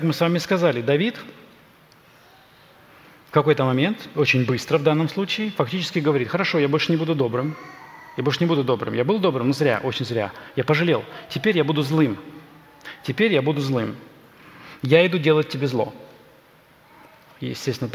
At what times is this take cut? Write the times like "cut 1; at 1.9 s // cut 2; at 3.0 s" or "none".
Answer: none